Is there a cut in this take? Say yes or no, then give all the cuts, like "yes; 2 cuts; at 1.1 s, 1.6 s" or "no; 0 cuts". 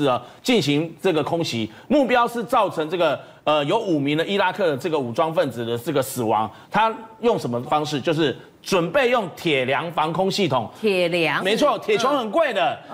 yes; 3 cuts; at 6.6 s, 7.6 s, 11.4 s